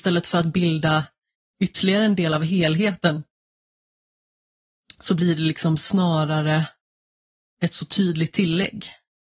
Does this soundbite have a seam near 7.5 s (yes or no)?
no